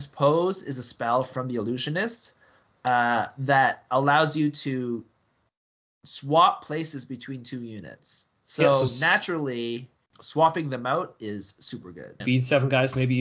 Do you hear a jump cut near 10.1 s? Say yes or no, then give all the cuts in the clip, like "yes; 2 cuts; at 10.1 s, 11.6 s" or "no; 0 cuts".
yes; 3 cuts; at 8.4 s, 10.1 s, 12.2 s